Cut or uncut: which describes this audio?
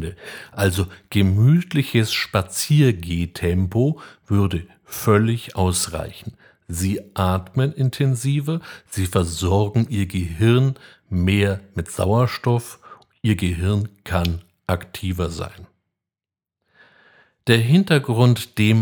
uncut